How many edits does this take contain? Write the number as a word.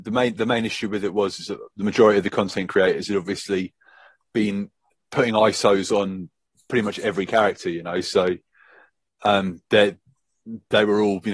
zero